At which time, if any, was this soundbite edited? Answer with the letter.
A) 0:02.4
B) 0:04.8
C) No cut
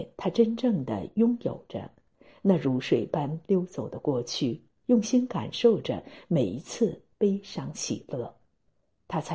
C